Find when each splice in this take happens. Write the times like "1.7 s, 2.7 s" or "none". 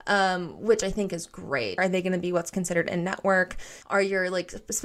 1.8 s, 3.8 s